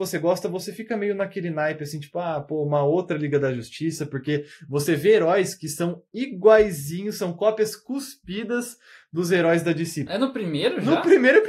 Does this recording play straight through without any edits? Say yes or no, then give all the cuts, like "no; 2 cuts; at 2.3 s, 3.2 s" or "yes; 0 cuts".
no; 1 cut; at 10.1 s